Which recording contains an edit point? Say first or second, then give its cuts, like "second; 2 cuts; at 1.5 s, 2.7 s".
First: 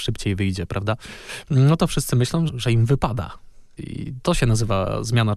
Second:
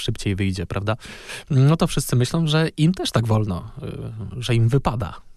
first; 2 cuts; at 2.5 s, 3.8 s